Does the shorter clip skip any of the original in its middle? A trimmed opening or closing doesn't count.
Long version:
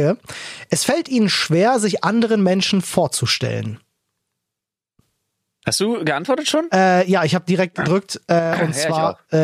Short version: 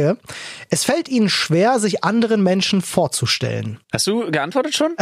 yes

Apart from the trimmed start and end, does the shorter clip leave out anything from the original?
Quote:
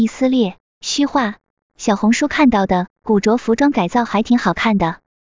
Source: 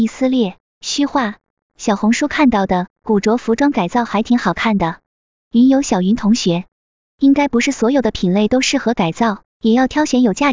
no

